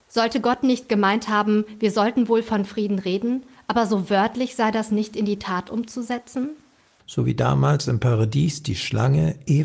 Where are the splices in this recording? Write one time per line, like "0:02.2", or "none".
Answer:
0:07.0